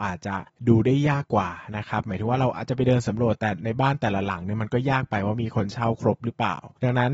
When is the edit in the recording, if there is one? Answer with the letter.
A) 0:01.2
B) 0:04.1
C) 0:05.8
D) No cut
A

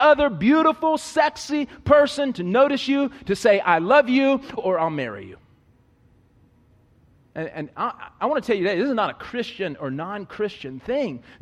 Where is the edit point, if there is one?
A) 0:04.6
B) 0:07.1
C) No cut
A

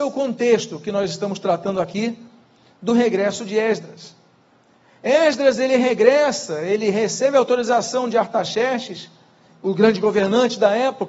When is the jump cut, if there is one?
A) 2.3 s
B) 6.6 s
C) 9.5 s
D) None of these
C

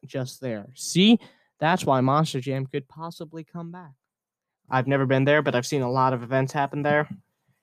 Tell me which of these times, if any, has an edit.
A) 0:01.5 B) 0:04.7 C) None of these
B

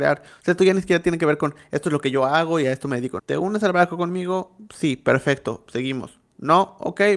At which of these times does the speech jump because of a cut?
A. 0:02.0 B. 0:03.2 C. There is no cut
B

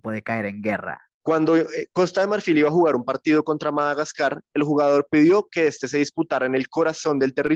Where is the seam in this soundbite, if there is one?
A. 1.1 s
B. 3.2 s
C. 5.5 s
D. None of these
A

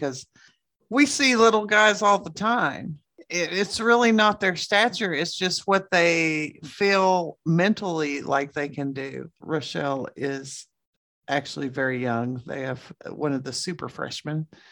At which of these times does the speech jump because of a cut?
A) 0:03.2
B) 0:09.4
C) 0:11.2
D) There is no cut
B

